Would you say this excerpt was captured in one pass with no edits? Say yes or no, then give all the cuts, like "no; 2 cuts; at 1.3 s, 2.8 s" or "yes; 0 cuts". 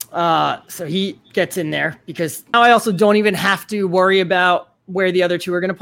no; 1 cut; at 2.5 s